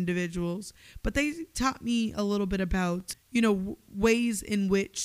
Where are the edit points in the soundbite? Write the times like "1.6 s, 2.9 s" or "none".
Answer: 3.1 s

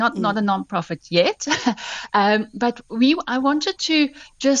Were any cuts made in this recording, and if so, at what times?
none

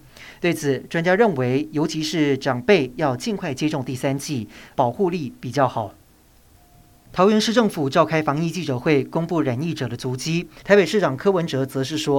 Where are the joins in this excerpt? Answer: 4.7 s, 10.6 s

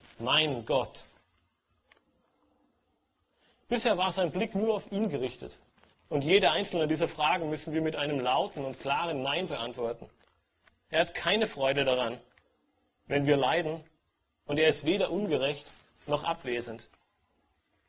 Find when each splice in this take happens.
5.9 s

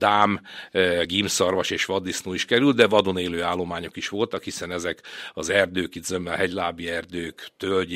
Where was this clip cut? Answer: none

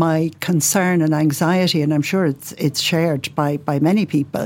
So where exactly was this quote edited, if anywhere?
none

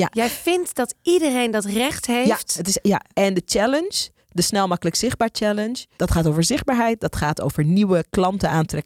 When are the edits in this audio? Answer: 3.1 s, 6.0 s

